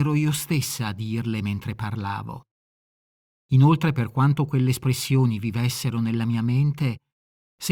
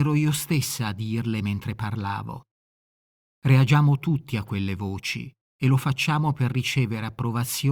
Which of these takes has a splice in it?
second; 1 cut; at 3.2 s

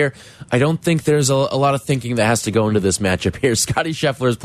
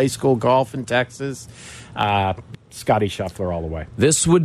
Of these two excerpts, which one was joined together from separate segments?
second; 1 cut; at 2.5 s

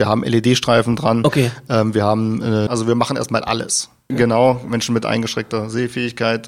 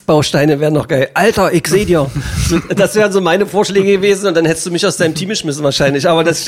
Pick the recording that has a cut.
first; 2 cuts; at 2.7 s, 4.1 s

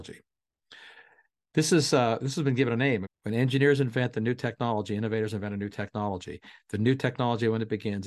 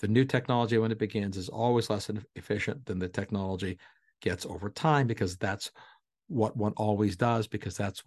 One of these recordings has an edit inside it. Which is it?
first; 1 cut; at 3.0 s

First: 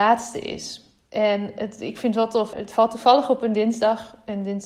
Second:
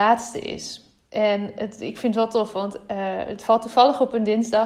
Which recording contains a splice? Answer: first; 1 cut; at 2.5 s

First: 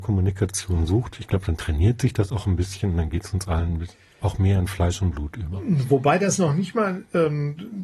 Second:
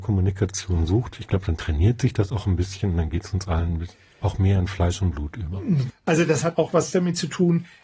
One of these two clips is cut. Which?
second; 1 cut; at 5.9 s

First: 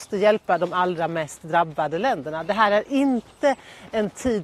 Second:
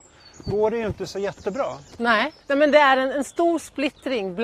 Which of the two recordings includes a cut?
second; 1 cut; at 2.4 s

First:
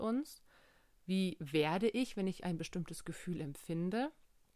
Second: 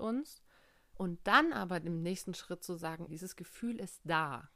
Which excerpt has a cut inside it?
second; 2 cuts; at 0.9 s, 3.1 s

